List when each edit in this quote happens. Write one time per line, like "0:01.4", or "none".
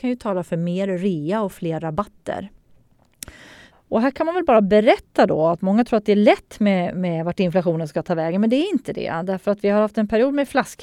0:03.7

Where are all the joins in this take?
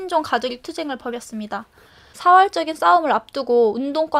0:02.1

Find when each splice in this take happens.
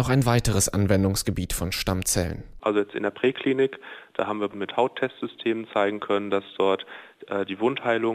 0:02.6

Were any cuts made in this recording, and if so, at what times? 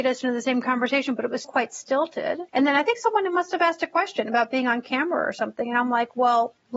0:01.4
0:02.5

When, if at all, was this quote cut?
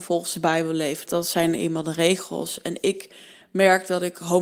0:01.1

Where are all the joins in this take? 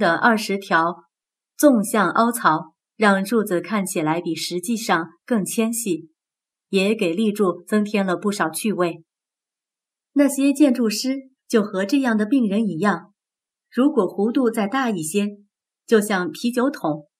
0:10.0
0:13.5
0:15.7

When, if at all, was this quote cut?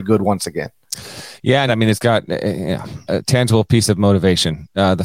0:01.7
0:03.1

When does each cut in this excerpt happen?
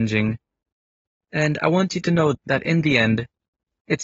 0:02.3

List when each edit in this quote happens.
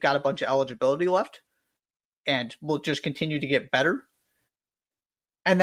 none

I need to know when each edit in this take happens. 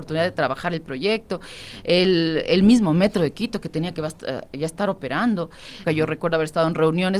0:05.8

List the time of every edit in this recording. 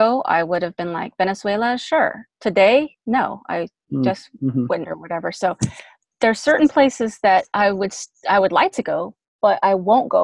0:04.8

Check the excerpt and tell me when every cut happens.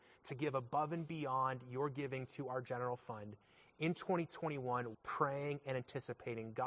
0:04.9

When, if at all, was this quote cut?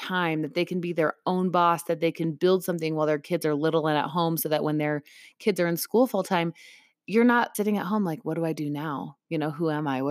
0:07.5

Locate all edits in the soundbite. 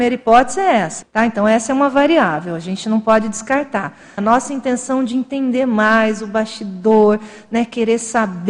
0:01.0
0:04.2

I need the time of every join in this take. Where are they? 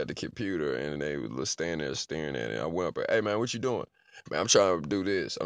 0:01.0

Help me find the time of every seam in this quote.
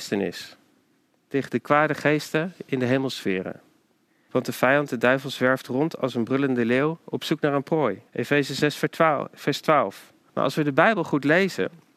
0:04.3
0:08.1
0:10.3

